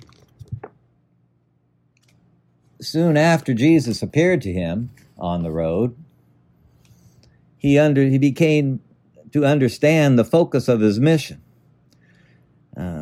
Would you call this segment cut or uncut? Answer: uncut